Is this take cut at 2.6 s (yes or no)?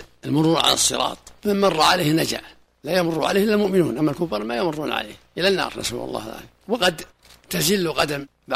no